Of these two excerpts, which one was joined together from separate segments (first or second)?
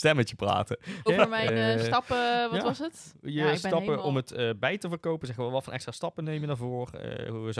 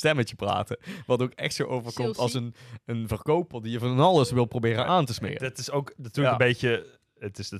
first